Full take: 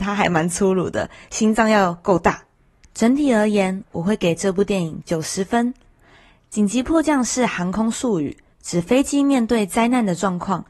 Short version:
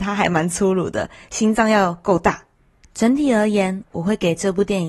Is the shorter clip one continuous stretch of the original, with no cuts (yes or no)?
yes